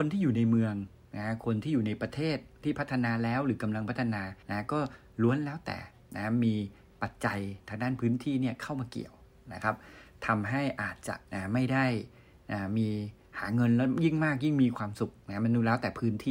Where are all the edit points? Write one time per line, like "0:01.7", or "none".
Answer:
0:04.4
0:11.3